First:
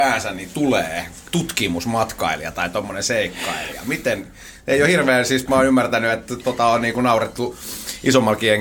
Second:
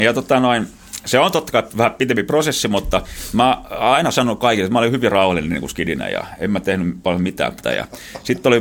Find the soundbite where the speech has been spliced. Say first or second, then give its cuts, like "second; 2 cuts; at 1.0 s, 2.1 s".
second; 1 cut; at 7.6 s